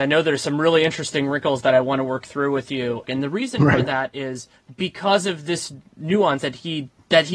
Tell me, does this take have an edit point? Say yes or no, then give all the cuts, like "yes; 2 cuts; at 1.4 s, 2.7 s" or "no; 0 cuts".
yes; 2 cuts; at 3.0 s, 6.4 s